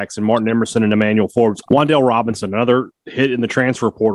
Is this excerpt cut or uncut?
cut